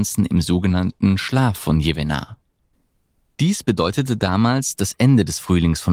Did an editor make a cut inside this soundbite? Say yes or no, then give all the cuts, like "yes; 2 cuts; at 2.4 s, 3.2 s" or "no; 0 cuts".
no; 0 cuts